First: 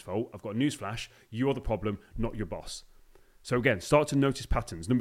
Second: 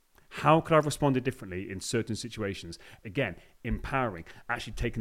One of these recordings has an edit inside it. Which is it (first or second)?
second